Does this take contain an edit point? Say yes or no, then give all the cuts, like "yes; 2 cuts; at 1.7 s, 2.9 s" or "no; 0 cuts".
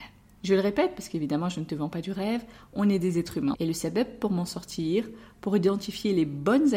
yes; 1 cut; at 3.5 s